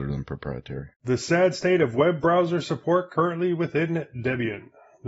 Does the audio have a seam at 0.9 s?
yes; 1 cut; at 0.9 s

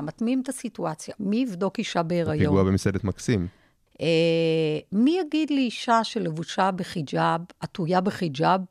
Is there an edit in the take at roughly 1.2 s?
yes; 2 cuts; at 1.2 s, 3.9 s

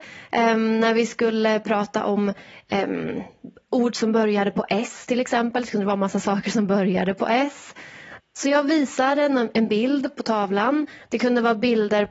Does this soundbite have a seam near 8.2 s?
yes; 2 cuts; at 8.2 s, 11.0 s

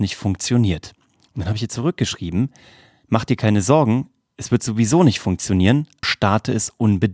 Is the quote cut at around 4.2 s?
no; 1 cut; at 6.0 s

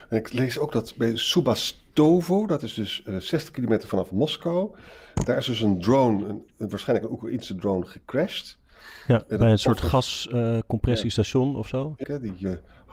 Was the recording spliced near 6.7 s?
no; 1 cut; at 12.0 s

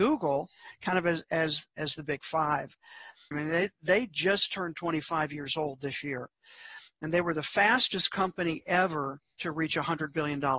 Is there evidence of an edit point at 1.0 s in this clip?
no; 1 cut; at 3.3 s

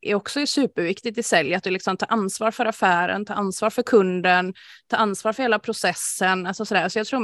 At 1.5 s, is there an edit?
no; 0 cuts

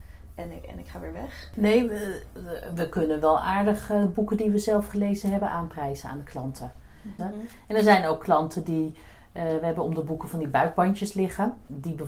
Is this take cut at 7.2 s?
yes; 1 cut; at 7.2 s

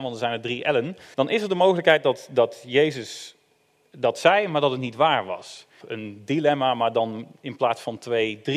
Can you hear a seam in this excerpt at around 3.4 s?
no; 2 cuts; at 1.1 s, 5.8 s

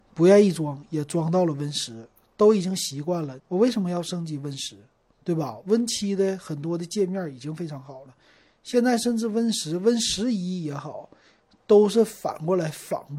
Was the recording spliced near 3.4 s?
yes; 1 cut; at 3.4 s

